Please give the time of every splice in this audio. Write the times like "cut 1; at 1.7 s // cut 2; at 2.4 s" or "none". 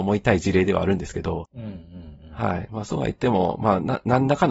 none